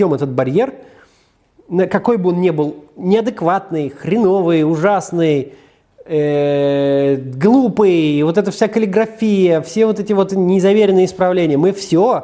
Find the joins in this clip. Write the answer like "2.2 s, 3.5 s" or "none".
none